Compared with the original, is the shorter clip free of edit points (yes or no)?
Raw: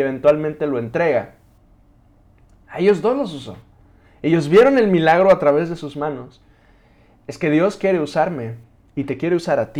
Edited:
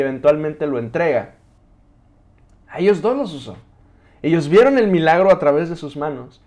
yes